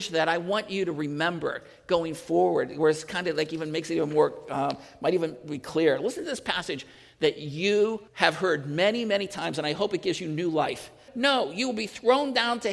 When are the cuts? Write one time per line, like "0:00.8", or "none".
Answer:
0:08.1
0:11.1